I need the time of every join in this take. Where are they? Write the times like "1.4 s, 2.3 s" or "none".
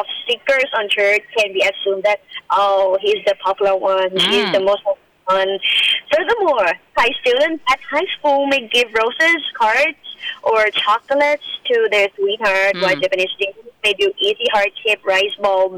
none